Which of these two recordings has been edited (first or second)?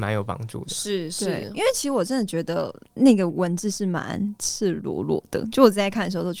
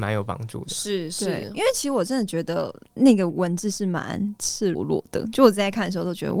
second